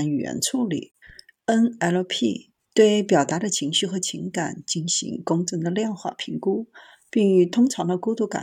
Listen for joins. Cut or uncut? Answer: uncut